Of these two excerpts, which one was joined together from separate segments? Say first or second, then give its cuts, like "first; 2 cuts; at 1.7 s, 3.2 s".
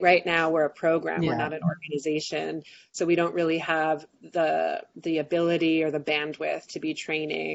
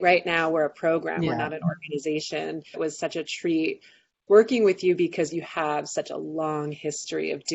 second; 1 cut; at 2.7 s